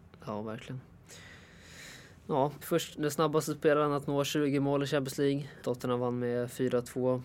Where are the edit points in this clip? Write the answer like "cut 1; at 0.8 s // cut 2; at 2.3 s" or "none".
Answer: cut 1; at 2.6 s // cut 2; at 5.6 s